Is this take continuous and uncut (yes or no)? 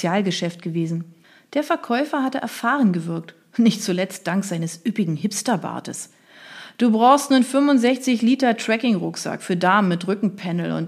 yes